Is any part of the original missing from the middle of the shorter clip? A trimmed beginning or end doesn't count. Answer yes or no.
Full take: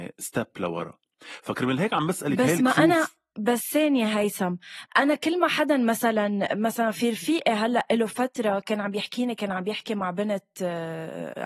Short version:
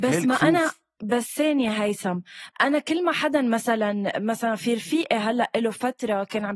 no